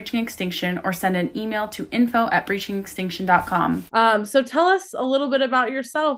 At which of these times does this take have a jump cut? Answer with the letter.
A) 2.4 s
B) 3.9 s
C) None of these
B